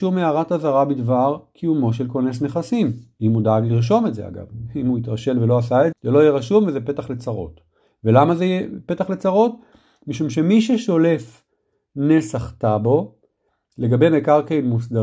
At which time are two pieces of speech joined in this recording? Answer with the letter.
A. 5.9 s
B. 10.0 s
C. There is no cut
A